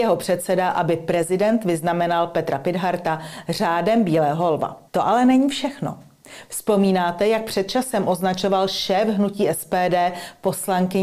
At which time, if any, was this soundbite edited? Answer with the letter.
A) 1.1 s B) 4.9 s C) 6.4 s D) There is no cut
B